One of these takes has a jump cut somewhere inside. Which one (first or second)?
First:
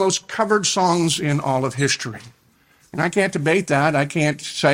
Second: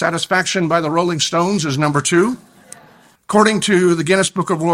second